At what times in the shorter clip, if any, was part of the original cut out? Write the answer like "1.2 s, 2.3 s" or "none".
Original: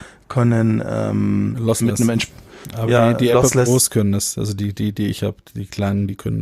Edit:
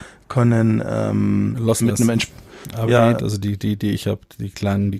3.2 s